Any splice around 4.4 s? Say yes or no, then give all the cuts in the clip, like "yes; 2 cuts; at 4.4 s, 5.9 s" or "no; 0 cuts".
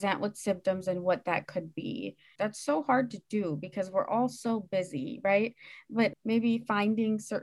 no; 2 cuts; at 2.4 s, 6.1 s